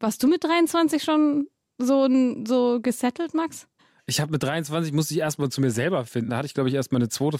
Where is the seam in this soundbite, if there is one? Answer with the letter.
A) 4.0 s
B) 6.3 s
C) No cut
B